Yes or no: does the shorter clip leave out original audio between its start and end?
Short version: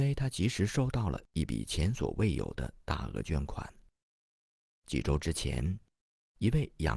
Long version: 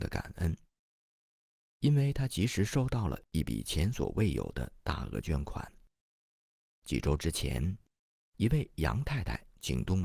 no